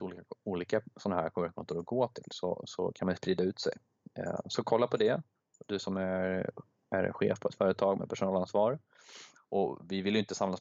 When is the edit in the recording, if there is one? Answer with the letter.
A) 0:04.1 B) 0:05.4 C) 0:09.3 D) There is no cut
C